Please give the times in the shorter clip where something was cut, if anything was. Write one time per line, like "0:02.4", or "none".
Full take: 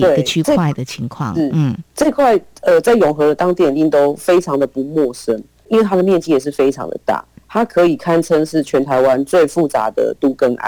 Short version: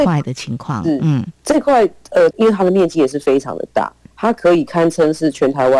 0:02.3